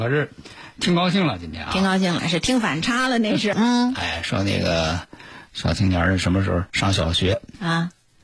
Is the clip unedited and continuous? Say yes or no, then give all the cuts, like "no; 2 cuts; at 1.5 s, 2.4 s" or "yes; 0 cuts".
no; 3 cuts; at 2.2 s, 3.5 s, 6.7 s